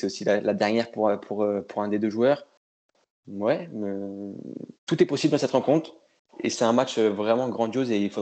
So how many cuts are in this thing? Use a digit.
1